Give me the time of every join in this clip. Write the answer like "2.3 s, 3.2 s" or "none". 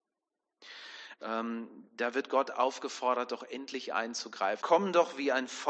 1.1 s, 4.6 s